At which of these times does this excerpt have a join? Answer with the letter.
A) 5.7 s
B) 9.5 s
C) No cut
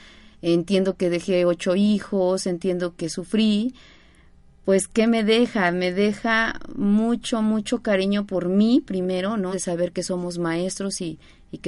B